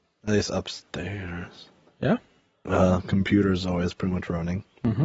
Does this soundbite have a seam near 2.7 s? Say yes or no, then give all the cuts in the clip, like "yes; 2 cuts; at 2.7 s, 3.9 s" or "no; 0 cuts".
yes; 1 cut; at 2.7 s